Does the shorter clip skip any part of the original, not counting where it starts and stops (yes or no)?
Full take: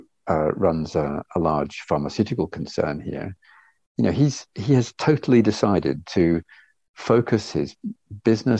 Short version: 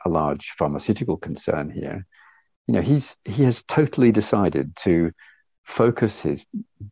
no